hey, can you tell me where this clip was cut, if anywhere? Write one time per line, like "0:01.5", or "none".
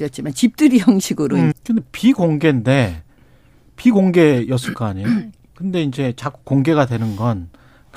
0:01.5